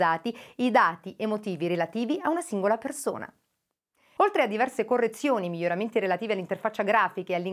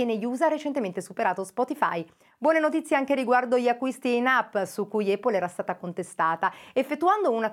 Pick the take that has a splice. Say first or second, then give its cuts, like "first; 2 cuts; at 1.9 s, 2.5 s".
first; 1 cut; at 4.2 s